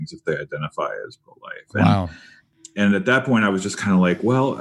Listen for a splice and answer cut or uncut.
uncut